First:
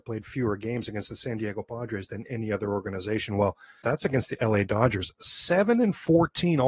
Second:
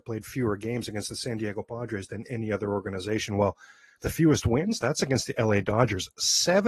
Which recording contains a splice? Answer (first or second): first